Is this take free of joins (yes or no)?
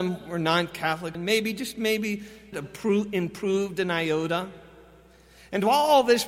no